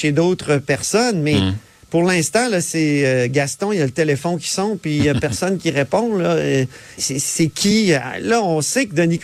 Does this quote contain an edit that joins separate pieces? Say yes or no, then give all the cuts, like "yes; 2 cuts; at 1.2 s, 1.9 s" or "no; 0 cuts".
yes; 1 cut; at 7.0 s